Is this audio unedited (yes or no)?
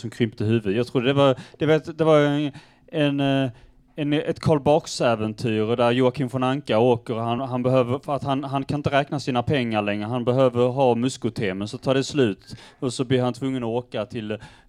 yes